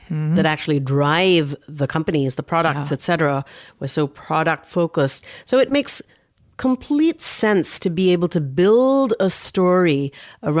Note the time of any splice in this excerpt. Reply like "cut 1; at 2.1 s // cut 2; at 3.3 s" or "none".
none